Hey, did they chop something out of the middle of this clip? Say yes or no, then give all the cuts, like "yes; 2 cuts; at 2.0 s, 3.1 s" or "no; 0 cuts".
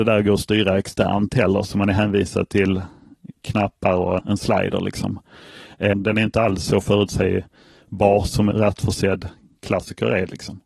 yes; 3 cuts; at 4.2 s, 5.9 s, 8.5 s